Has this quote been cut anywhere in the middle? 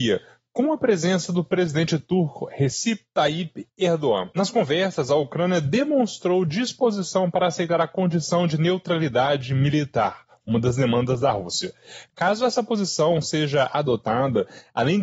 no; 0 cuts

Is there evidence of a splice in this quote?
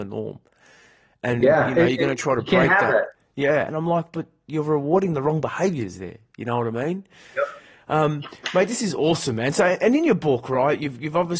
yes; 2 cuts; at 1.4 s, 3.7 s

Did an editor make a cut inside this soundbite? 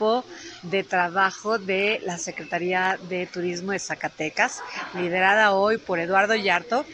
no; 0 cuts

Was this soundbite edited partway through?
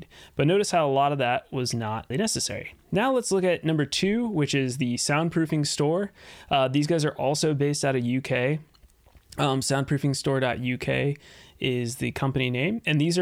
yes; 1 cut; at 2.1 s

